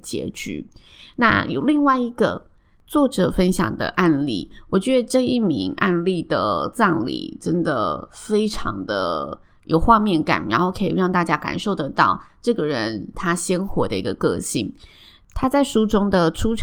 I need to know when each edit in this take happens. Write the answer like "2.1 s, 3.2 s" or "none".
none